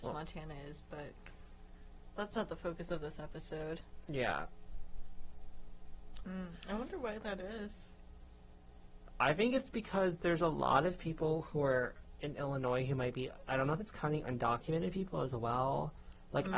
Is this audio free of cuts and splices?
no; 1 cut; at 6.2 s

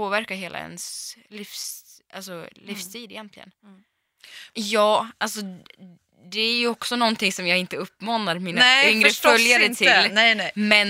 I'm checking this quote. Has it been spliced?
yes; 1 cut; at 4.5 s

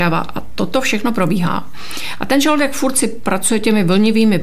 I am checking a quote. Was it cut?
no; 0 cuts

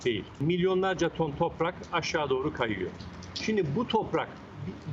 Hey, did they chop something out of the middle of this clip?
no; 0 cuts

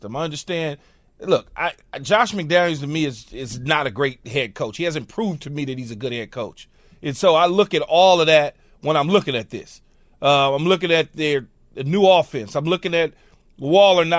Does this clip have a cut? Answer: no; 0 cuts

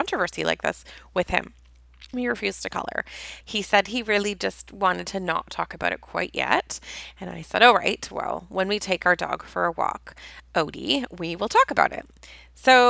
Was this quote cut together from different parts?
yes; 2 cuts; at 2.1 s, 3.4 s

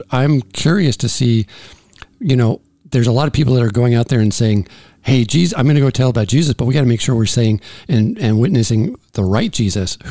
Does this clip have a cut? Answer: no; 0 cuts

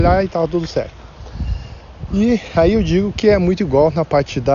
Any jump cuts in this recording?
no; 0 cuts

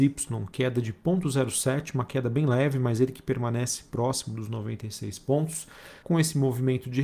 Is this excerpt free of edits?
no; 1 cut; at 6.0 s

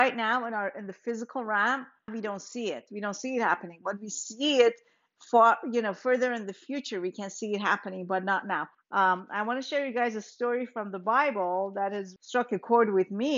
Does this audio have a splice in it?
yes; 3 cuts; at 2.1 s, 8.7 s, 12.2 s

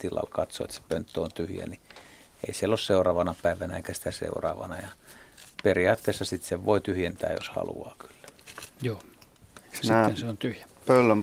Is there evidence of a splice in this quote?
no; 0 cuts

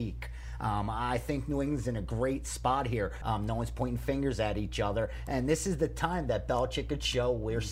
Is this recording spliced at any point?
yes; 1 cut; at 3.2 s

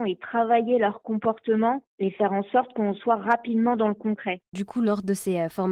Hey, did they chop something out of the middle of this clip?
yes; 1 cut; at 4.4 s

